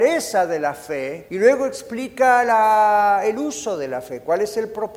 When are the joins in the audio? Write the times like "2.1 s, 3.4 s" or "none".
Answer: 1.3 s

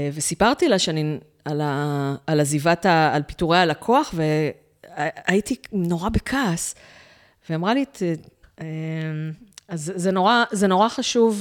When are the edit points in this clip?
8.4 s

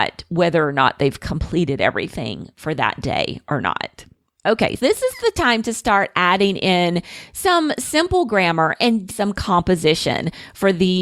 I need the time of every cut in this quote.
4.8 s, 9.1 s

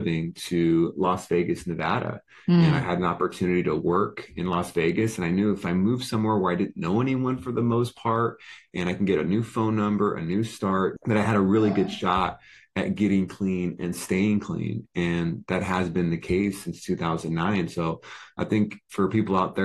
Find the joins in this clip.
11.0 s

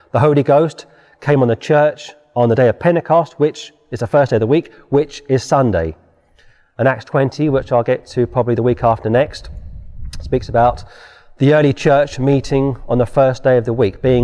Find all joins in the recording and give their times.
none

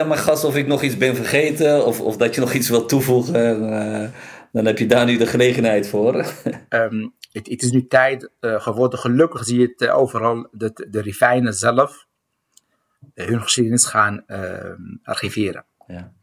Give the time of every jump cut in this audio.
6.7 s

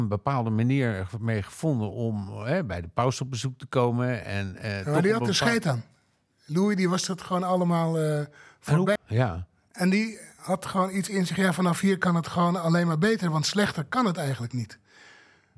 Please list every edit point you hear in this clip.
9.0 s

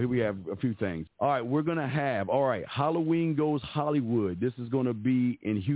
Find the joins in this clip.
1.1 s

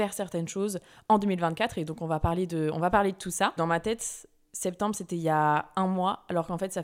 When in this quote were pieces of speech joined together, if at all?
3.6 s

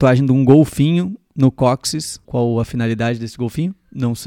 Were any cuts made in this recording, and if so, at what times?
none

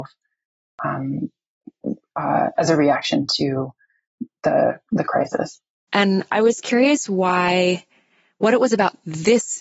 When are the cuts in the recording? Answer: 5.9 s

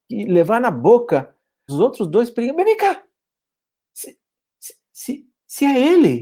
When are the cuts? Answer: 1.7 s

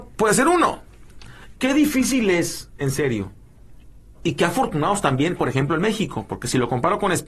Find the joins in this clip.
1.5 s

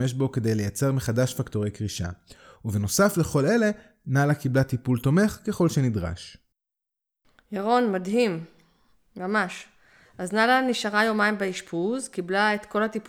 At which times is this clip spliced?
none

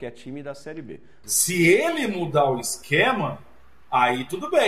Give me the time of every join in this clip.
1.2 s

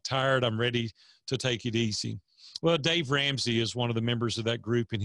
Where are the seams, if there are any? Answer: none

